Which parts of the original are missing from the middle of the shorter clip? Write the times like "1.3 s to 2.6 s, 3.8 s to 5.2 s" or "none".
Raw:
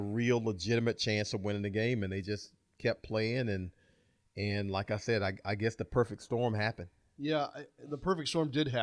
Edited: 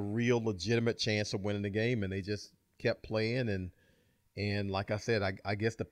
none